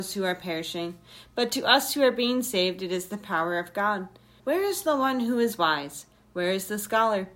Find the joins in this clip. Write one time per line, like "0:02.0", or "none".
0:04.4